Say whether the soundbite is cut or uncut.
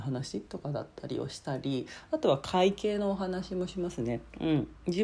uncut